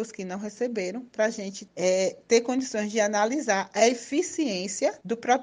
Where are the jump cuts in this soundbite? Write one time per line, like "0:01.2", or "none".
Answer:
none